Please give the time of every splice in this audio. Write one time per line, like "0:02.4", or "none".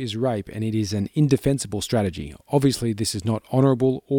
none